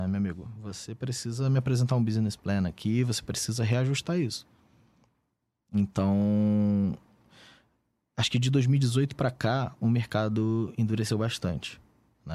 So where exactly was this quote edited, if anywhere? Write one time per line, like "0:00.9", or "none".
none